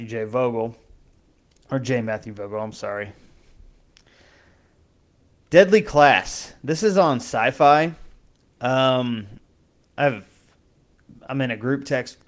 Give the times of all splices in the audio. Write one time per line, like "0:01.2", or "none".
none